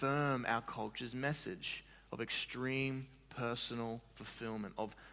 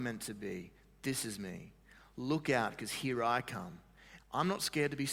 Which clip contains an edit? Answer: second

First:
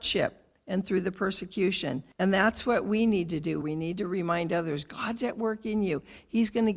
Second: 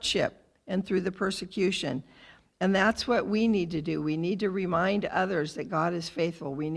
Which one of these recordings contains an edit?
first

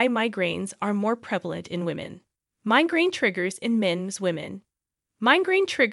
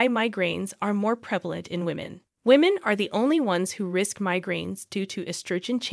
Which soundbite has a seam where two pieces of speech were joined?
second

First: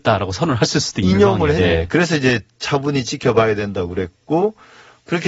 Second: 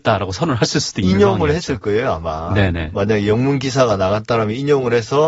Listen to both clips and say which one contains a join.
first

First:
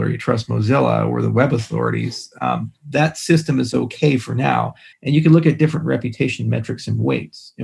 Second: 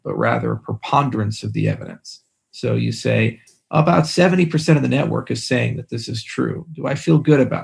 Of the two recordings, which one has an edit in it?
first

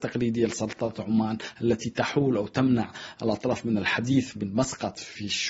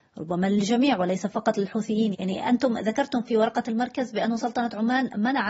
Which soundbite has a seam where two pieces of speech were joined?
second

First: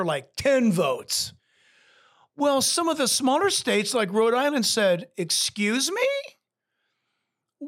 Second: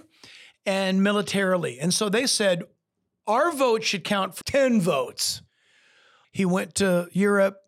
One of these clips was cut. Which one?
second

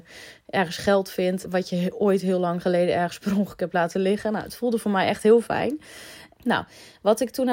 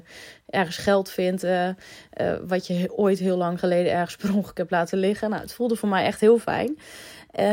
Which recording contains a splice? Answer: first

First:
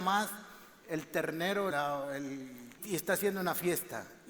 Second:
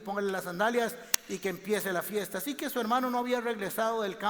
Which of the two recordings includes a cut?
first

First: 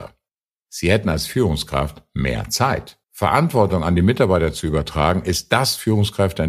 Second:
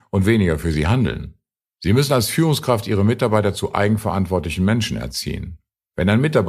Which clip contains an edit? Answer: first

